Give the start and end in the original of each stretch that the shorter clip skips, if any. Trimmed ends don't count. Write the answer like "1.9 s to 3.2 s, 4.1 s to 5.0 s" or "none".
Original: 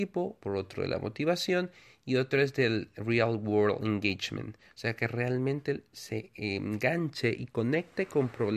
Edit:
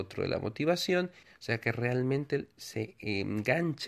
1.8 s to 4.6 s